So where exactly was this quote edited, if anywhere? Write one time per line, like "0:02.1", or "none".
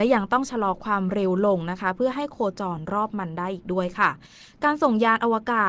none